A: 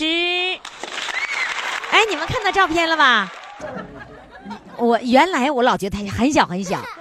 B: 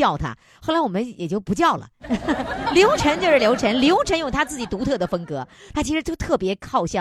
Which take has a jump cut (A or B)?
A